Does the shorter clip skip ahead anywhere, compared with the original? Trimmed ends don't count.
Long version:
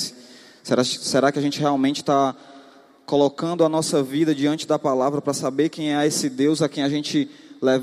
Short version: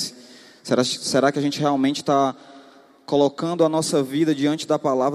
no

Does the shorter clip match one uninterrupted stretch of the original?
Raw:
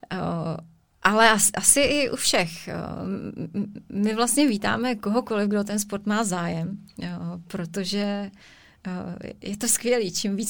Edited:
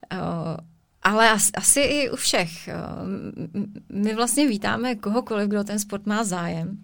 yes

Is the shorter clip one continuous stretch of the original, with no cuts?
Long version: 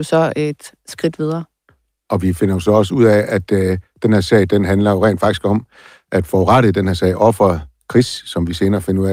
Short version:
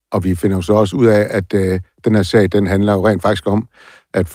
yes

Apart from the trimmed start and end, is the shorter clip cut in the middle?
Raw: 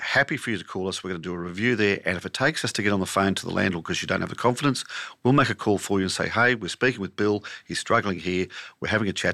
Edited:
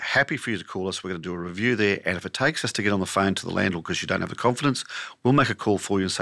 no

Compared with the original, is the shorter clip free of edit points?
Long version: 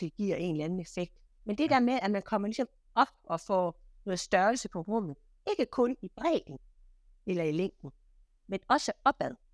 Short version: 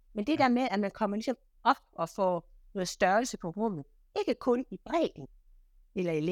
yes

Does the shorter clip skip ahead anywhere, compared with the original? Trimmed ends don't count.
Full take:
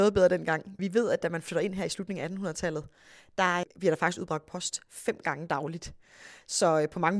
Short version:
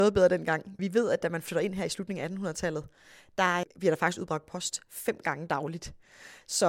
no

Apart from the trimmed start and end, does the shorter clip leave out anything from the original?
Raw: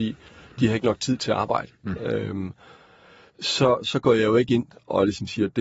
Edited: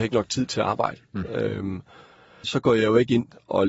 yes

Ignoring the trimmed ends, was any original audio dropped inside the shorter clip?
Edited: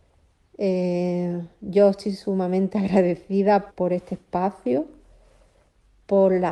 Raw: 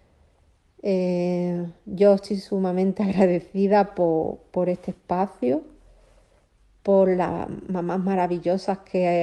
yes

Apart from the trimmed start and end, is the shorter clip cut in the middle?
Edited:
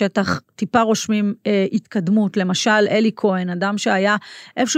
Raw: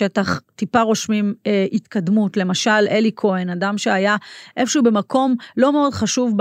no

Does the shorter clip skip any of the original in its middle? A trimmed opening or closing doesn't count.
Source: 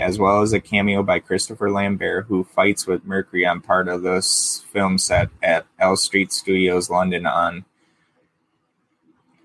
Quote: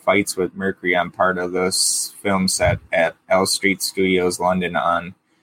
no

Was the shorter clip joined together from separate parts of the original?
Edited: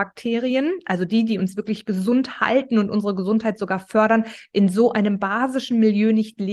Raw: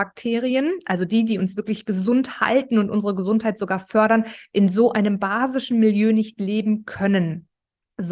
no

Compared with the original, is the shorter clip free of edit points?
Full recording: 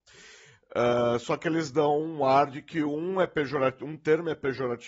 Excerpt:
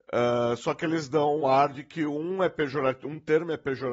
no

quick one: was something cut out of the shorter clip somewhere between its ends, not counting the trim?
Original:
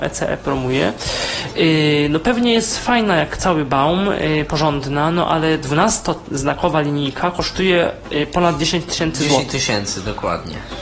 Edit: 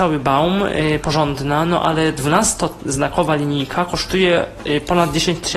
no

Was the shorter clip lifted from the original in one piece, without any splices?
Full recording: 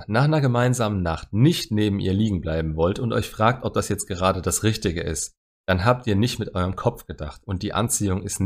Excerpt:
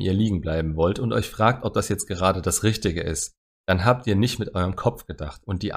yes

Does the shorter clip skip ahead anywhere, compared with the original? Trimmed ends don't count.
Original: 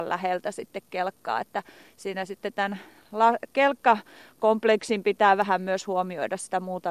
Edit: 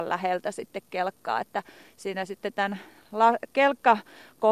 no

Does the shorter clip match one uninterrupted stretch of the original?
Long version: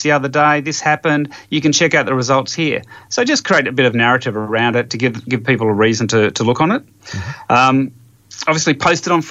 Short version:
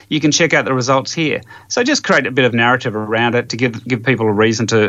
yes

